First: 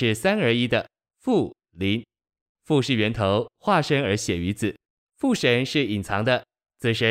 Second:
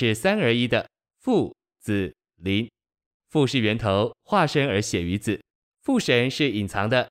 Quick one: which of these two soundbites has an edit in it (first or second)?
first